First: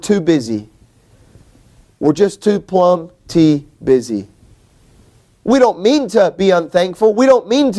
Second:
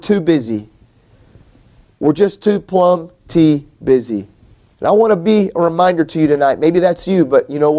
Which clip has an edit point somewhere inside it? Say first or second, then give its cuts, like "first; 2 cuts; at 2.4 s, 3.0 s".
second; 1 cut; at 4.7 s